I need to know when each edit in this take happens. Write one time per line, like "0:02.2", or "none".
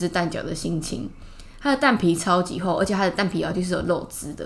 none